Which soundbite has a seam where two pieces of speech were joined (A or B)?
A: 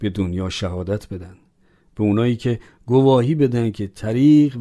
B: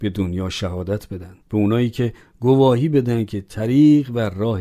B